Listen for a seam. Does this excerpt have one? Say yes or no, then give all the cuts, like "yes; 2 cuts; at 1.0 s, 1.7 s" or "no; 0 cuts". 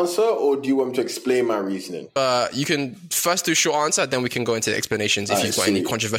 no; 0 cuts